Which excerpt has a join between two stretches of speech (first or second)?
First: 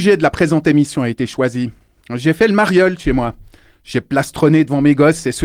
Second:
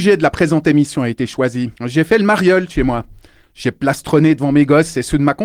second